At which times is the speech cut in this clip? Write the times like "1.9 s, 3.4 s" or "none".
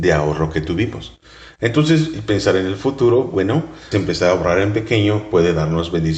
3.9 s